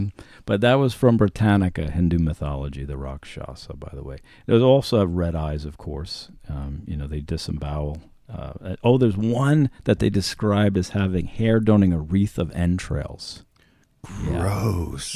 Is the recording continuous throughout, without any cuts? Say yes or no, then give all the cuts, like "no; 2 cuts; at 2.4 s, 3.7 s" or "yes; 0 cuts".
yes; 0 cuts